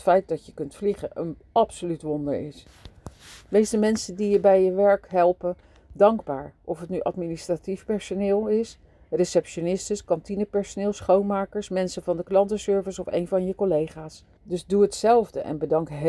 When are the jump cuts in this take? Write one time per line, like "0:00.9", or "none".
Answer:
0:14.4